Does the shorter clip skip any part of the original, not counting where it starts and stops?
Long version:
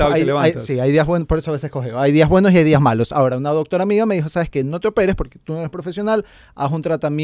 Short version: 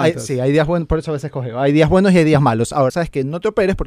yes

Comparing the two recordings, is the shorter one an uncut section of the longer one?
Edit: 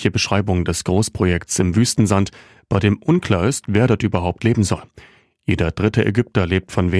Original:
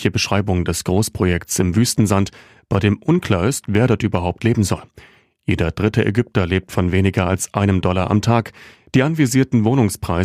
yes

